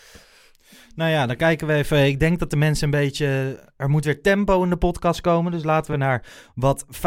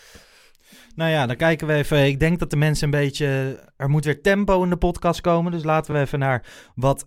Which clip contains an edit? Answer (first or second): first